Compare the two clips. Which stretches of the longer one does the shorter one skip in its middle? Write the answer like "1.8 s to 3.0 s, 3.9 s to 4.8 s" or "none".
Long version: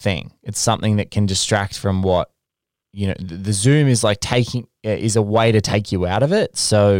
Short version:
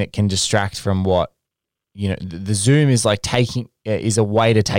none